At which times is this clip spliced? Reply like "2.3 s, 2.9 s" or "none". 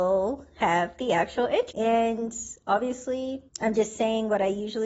1.7 s, 3.5 s